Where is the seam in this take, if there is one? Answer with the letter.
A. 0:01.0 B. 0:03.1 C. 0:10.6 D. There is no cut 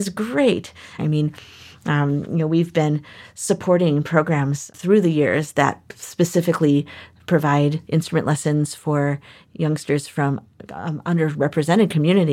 A